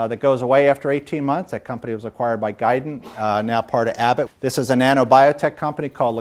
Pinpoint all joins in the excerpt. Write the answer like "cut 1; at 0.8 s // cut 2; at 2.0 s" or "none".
cut 1; at 4.3 s